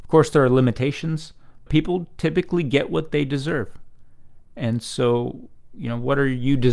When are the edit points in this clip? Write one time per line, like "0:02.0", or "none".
0:01.7